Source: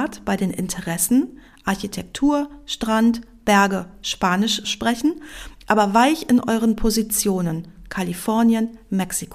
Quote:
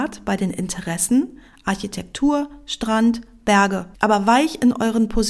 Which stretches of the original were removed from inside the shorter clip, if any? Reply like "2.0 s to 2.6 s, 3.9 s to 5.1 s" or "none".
3.9 s to 5.6 s